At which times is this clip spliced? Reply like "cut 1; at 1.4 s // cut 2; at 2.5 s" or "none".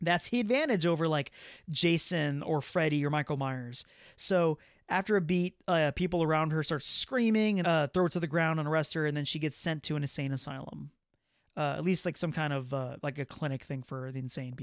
cut 1; at 7.6 s